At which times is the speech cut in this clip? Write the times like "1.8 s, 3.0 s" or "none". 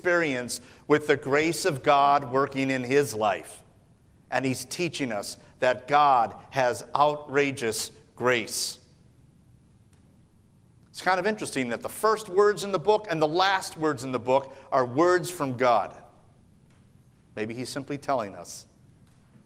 none